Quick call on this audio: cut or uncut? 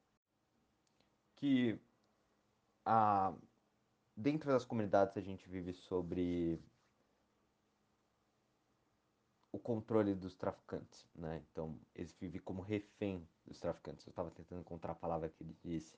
uncut